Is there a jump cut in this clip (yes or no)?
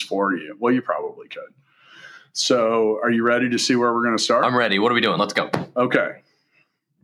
no